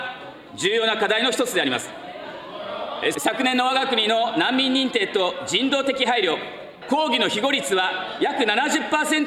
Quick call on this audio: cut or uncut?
cut